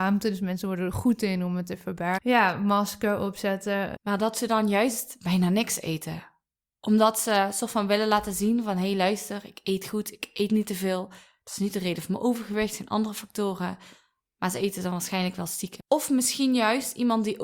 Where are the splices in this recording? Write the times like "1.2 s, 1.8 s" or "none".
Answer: 2.2 s, 4.0 s, 15.8 s

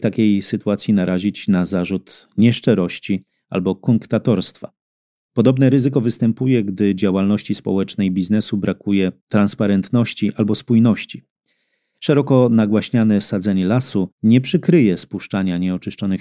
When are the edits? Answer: none

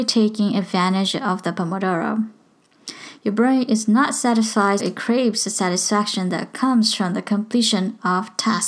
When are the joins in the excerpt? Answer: 4.8 s

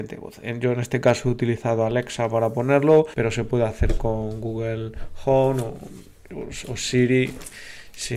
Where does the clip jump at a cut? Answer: none

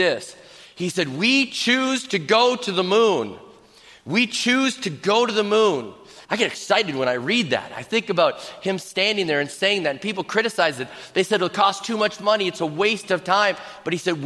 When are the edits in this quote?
6.2 s

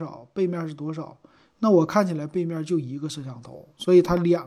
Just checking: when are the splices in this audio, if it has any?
none

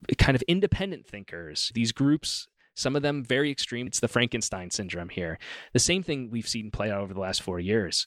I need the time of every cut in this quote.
1.7 s, 3.9 s

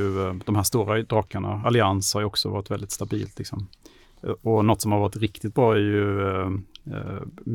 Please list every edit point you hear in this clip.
none

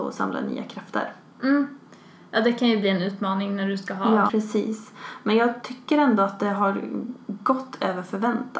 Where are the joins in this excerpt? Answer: 4.3 s

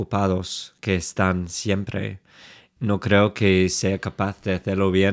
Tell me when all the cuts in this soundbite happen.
2.8 s

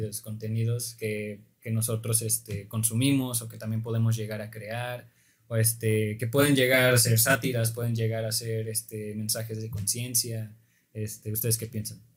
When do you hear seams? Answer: none

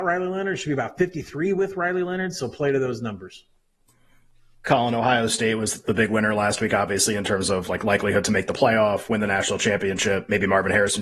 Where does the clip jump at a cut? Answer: none

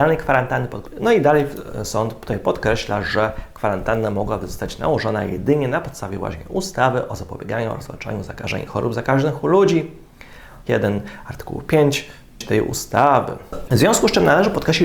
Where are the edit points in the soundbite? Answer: 10.7 s, 13.7 s

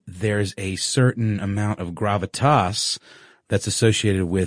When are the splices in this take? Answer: none

